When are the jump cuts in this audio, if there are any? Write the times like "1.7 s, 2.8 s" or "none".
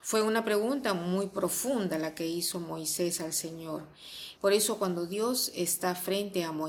4.4 s